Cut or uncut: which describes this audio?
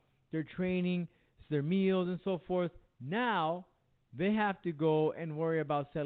uncut